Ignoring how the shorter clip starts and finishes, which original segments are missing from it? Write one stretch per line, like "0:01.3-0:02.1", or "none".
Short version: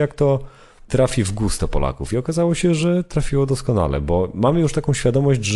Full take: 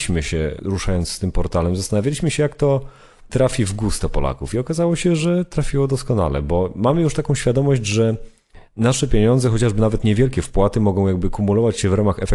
none